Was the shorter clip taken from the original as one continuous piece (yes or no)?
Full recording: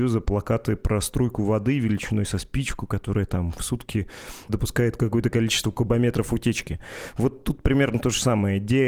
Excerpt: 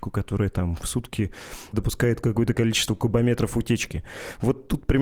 yes